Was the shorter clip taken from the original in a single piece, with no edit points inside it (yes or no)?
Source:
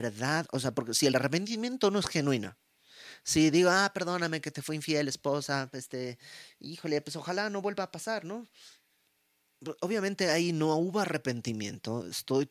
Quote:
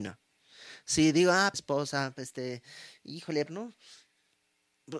no